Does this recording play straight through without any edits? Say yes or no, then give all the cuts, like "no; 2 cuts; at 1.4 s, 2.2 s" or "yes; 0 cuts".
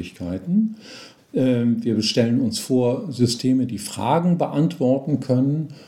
no; 1 cut; at 1.2 s